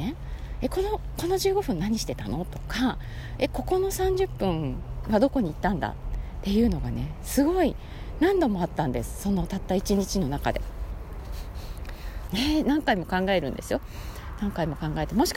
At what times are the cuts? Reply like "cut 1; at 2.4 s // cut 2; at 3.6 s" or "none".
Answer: cut 1; at 12.3 s

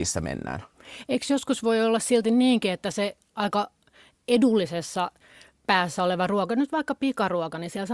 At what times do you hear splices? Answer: none

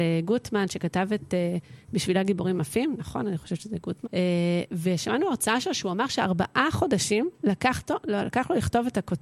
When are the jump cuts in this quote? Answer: cut 1; at 4.0 s

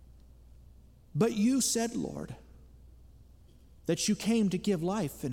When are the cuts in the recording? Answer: none

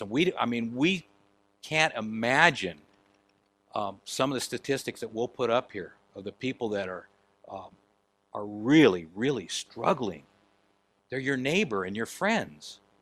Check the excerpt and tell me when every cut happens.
none

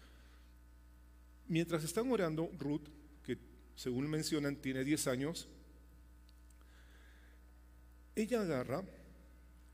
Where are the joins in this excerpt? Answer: cut 1; at 2.5 s

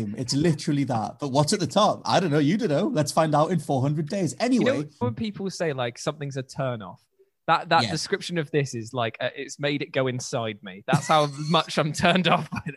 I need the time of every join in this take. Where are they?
cut 1; at 5.0 s

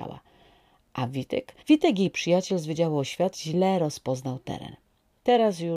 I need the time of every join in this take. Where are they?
cut 1; at 1.6 s // cut 2; at 3.3 s

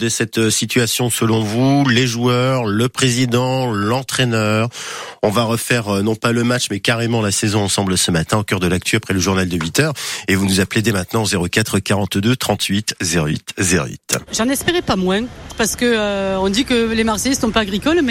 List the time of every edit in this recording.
cut 1; at 14.3 s // cut 2; at 15.5 s

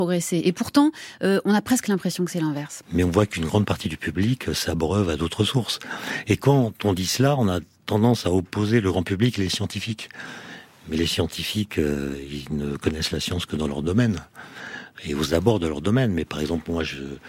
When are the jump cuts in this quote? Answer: cut 1; at 2.8 s

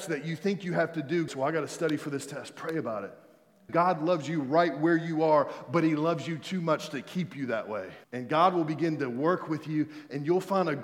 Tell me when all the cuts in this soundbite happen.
cut 1; at 1.3 s // cut 2; at 3.7 s // cut 3; at 8.0 s

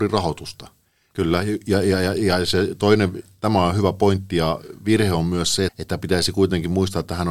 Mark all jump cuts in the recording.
cut 1; at 1.1 s // cut 2; at 5.7 s

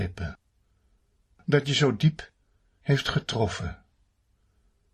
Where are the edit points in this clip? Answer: none

